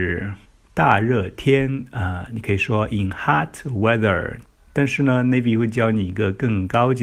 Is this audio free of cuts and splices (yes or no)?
yes